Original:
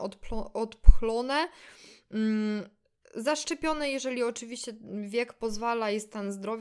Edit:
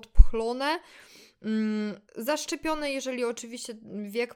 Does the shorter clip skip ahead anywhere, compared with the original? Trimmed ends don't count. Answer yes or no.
yes